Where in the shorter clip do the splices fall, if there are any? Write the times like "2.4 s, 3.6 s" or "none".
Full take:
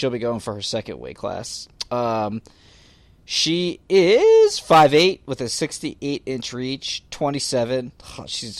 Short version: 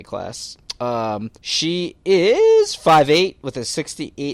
1.4 s

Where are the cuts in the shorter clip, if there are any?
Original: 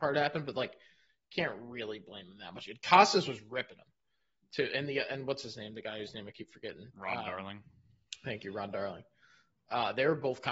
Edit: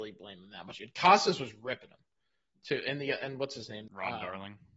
3.9 s

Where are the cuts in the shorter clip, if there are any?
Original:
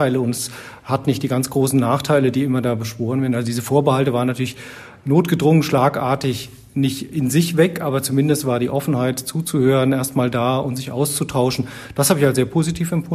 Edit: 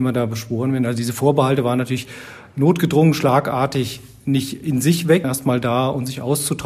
5.2 s

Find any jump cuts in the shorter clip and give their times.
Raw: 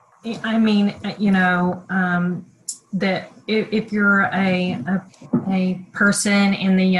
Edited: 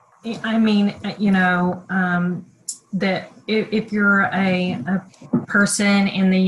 5.4 s

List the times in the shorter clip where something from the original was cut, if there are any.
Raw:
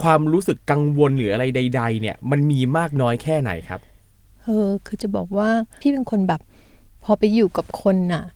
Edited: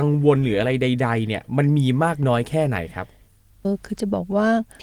3.6 s

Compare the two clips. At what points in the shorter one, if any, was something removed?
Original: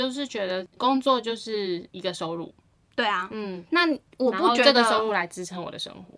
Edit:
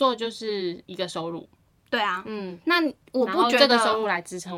none

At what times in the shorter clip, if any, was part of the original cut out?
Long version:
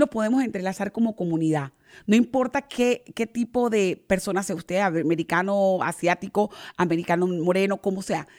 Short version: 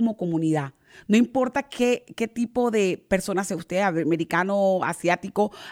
none

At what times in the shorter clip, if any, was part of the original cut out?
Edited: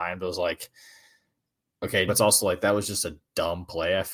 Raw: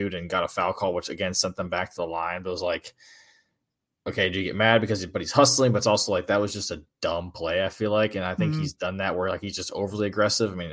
2.1 s

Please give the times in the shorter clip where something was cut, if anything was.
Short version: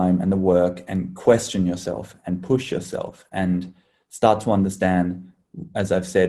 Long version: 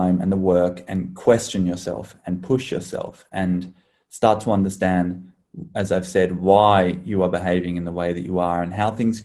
none

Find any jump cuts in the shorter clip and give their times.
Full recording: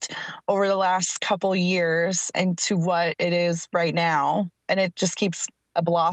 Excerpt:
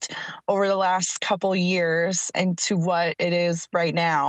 none

